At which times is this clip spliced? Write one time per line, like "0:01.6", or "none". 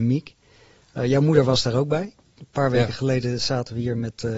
0:02.3

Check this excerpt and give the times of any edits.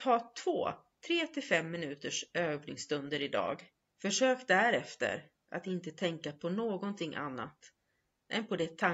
0:03.9

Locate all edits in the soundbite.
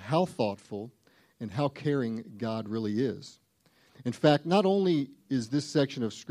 none

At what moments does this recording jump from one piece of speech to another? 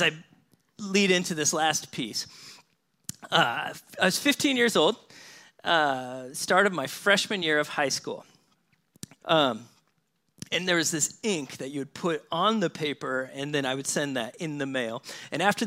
0:09.2

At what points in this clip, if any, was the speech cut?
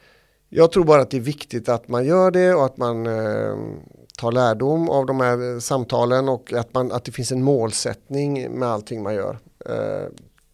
none

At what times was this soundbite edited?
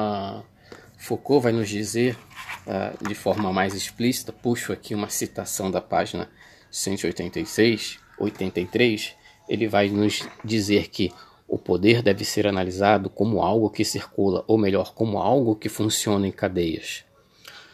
none

